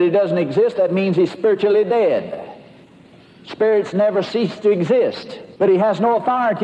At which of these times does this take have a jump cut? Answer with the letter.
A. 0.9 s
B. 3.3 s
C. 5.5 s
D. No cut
C